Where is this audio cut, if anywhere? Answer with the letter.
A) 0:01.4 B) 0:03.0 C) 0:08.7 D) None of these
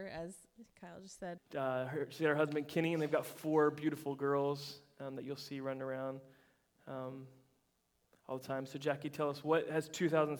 A